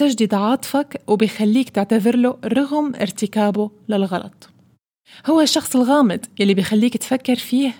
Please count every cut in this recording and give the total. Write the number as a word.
zero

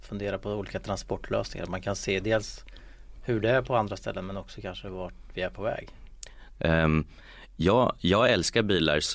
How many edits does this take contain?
one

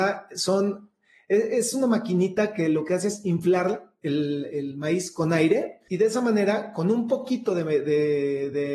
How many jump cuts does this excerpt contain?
one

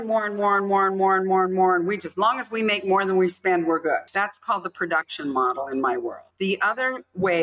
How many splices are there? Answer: one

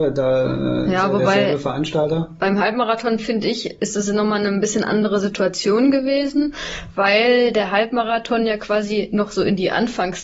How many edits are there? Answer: zero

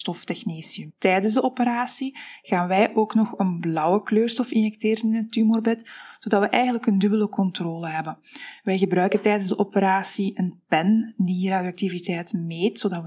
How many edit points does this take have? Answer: zero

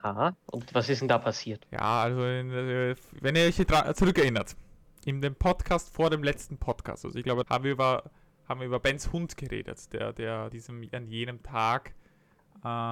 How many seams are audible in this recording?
two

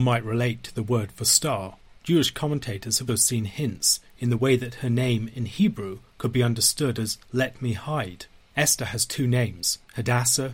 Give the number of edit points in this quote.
two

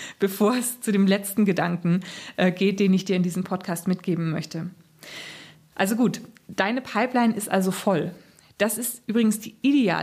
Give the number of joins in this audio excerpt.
zero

